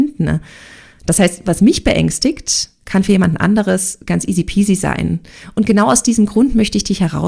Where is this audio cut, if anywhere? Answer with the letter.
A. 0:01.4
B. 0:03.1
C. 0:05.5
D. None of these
D